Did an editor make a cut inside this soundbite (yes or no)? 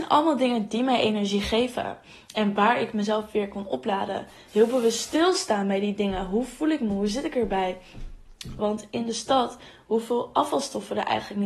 yes